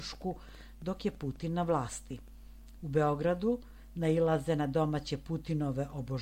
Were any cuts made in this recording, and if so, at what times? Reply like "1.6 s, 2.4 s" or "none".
2.8 s